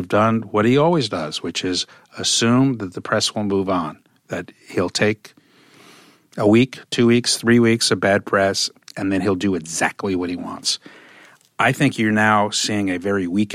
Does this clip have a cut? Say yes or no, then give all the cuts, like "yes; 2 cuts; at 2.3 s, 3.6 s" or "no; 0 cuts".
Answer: no; 0 cuts